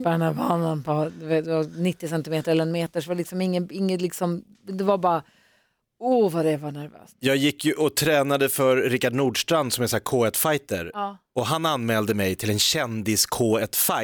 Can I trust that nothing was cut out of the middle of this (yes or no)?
yes